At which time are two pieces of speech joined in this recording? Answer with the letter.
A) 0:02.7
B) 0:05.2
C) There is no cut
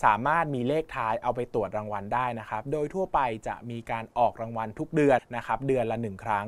B